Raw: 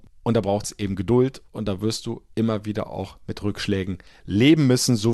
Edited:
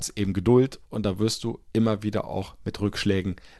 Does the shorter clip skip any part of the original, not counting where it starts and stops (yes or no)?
no